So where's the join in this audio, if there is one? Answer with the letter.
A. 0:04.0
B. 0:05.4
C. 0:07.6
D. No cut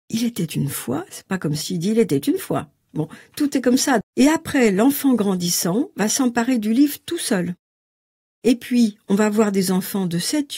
A